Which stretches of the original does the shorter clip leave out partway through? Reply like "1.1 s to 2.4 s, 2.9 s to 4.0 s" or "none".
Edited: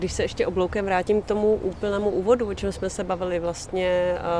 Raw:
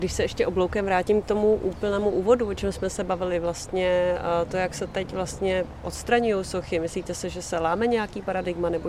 none